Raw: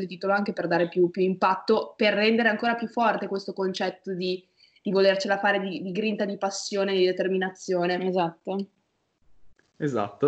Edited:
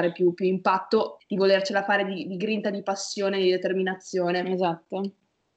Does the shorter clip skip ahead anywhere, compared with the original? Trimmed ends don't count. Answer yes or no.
yes